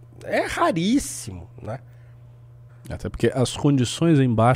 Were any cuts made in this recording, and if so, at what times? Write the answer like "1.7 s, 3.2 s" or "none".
2.7 s